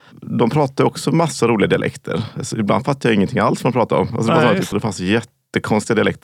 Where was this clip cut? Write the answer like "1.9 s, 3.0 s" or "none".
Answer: 4.7 s